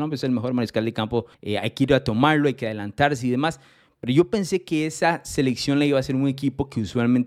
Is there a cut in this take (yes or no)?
yes